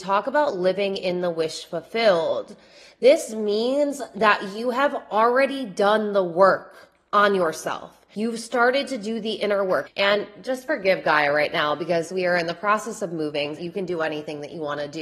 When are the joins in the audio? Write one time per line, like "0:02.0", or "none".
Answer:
0:09.9
0:13.6